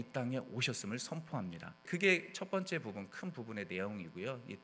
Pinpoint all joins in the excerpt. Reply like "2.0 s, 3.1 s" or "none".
1.8 s